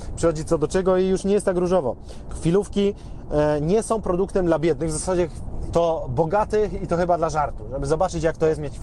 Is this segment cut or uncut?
cut